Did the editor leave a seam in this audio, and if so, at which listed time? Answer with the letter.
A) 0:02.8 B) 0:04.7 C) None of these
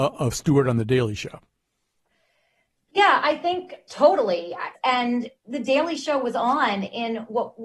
B